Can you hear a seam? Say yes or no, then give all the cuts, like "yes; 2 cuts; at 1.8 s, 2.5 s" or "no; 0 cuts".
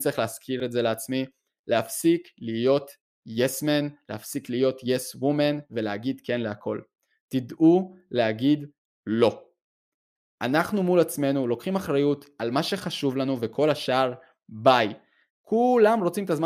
yes; 1 cut; at 15.3 s